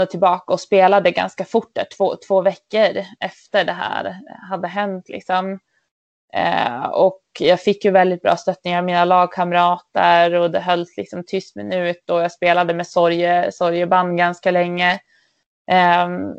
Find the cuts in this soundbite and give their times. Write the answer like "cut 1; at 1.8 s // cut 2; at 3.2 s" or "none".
none